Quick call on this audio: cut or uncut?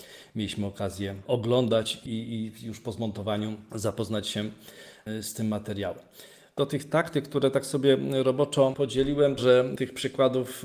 cut